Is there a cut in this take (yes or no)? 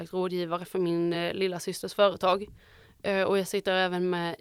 no